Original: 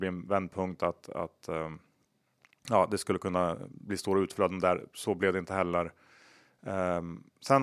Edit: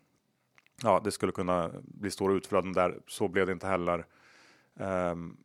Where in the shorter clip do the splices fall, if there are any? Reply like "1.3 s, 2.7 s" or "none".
none